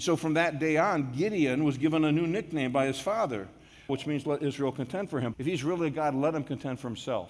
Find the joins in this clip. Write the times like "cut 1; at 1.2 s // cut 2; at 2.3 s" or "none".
cut 1; at 3.9 s // cut 2; at 5.3 s